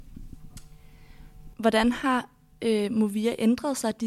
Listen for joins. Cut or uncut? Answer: cut